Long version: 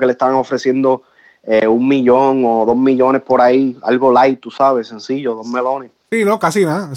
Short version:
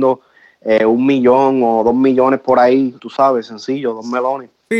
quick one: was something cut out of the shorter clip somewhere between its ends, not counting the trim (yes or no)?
yes